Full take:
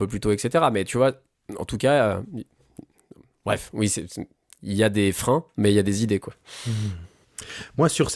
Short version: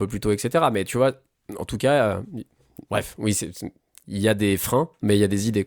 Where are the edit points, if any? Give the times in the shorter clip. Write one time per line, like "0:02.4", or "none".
0:02.8

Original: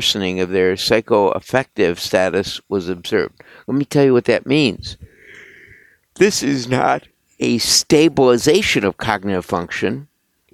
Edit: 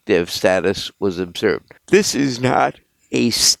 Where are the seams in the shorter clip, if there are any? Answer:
0:01.8

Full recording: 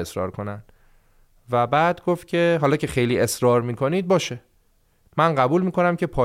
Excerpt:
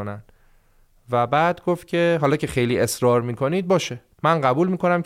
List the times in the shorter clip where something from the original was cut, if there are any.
0:04.1

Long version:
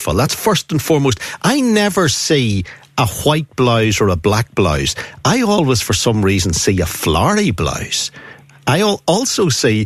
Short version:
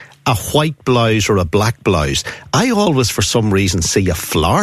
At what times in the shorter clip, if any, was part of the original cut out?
none

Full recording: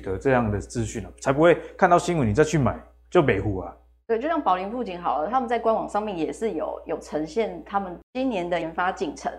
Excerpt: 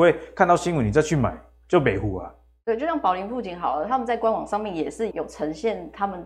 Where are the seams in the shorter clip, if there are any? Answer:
0:05.1

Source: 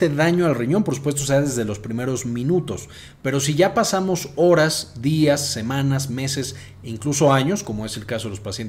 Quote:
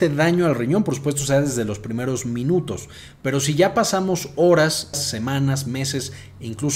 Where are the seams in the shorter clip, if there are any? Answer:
0:04.9

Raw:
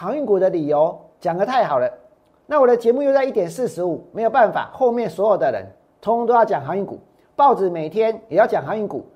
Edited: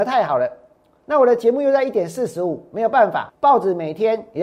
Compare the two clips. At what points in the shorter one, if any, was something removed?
0:03.3

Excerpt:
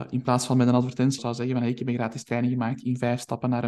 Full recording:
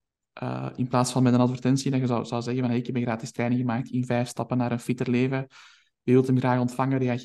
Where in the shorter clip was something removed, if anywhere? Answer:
0:01.2

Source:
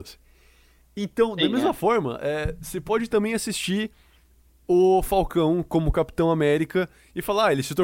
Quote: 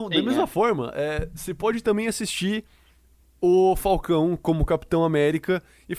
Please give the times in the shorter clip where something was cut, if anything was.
none

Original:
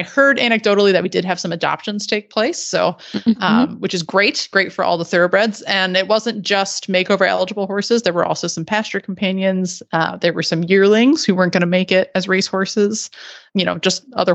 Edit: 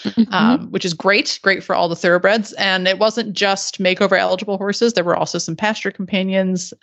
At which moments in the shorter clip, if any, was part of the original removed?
none

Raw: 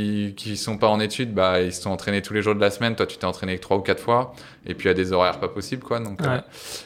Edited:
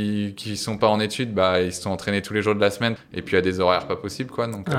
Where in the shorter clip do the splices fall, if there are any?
0:03.0

